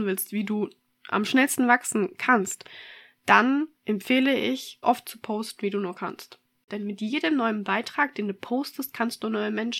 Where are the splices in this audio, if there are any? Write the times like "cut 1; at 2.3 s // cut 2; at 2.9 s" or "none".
cut 1; at 3.8 s // cut 2; at 4.8 s // cut 3; at 6.7 s